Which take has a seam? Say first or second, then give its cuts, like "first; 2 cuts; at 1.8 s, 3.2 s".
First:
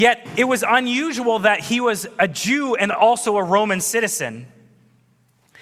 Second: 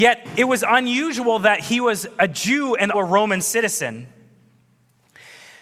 second; 1 cut; at 2.9 s